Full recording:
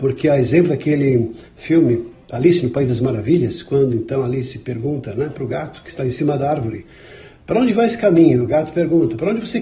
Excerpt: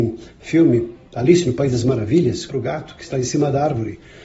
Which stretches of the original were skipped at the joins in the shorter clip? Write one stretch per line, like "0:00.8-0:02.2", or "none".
0:03.6-0:05.3